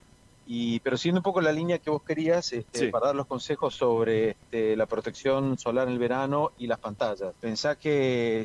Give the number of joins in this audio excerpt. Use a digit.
1